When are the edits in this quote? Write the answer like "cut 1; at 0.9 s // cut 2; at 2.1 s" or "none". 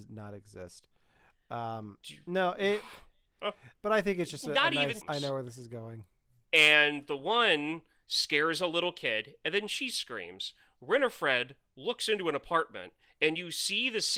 cut 1; at 3.7 s // cut 2; at 5.0 s

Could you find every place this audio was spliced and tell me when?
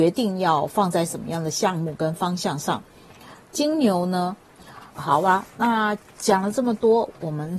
cut 1; at 4.9 s

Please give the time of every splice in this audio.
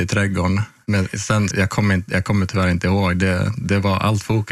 cut 1; at 1.5 s

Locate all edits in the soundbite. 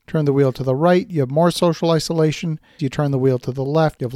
cut 1; at 2.8 s

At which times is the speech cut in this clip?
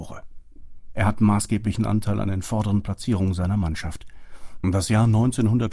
cut 1; at 0.9 s // cut 2; at 4.6 s

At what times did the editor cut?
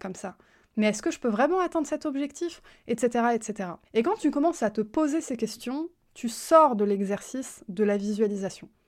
cut 1; at 3.8 s

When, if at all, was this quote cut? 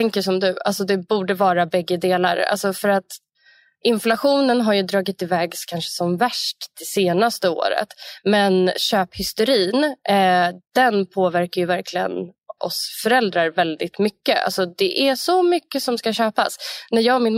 cut 1; at 12.6 s

